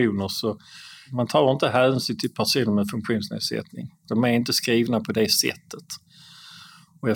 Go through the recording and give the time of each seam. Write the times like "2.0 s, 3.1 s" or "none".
none